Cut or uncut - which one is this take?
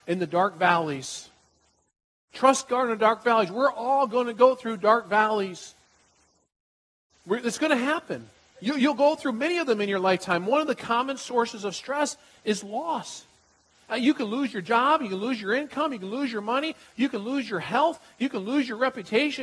uncut